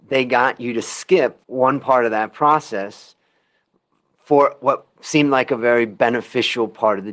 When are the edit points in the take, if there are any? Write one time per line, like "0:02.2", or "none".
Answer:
0:01.4